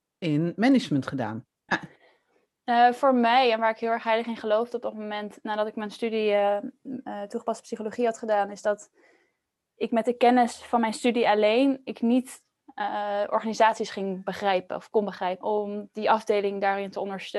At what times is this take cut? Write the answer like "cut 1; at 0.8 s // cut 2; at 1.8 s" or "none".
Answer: cut 1; at 1.7 s // cut 2; at 15.4 s